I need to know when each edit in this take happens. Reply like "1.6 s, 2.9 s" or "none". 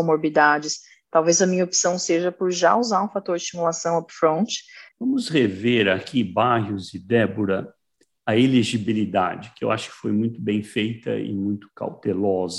4.9 s